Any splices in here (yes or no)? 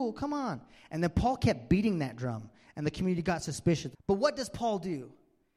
yes